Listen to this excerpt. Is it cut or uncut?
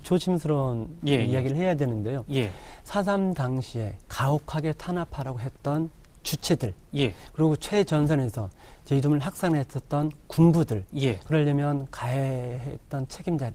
cut